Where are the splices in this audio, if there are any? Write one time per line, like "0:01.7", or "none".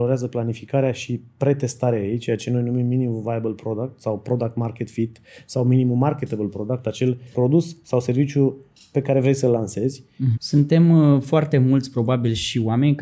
0:07.3
0:10.3